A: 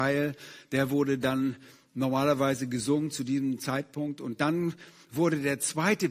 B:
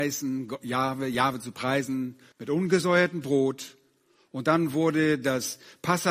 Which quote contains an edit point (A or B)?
B